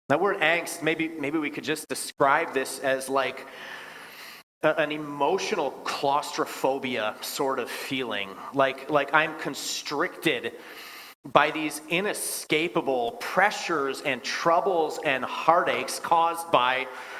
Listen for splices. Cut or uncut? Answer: uncut